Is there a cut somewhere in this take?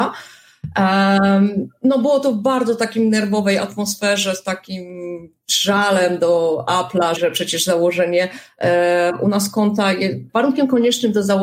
yes; 2 cuts; at 7.2 s, 10.3 s

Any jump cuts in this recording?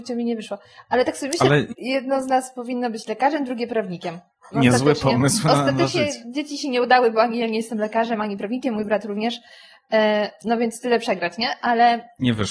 yes; 2 cuts; at 1.7 s, 4.5 s

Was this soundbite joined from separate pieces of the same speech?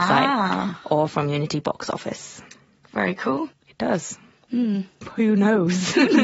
yes; 1 cut; at 3.5 s

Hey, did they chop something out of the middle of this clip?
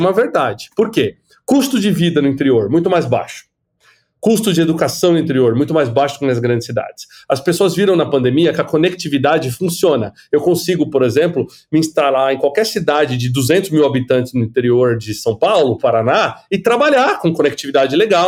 no; 0 cuts

